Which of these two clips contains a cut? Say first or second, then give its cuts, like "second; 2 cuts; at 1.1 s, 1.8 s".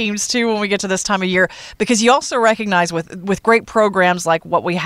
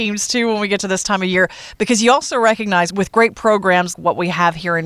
second; 2 cuts; at 2.9 s, 3.9 s